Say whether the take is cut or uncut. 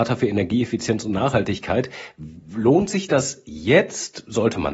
uncut